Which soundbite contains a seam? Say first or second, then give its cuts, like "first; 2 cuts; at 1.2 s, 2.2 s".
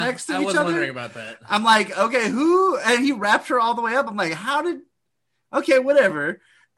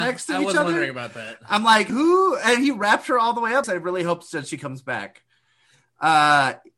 second; 2 cuts; at 1.9 s, 3.6 s